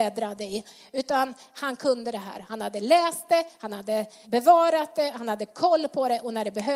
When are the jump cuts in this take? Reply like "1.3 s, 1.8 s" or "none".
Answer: 4.2 s